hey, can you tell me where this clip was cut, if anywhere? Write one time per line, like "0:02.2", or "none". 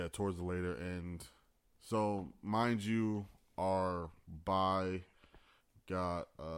none